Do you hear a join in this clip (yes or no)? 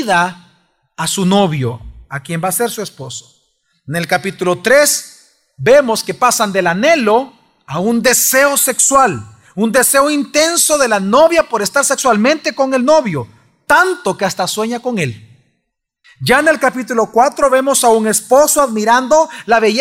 yes